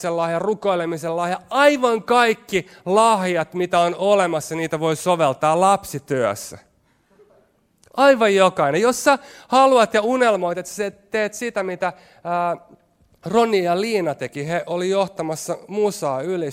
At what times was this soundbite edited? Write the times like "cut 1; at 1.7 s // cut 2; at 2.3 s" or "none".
none